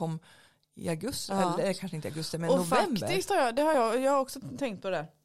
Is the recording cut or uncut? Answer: uncut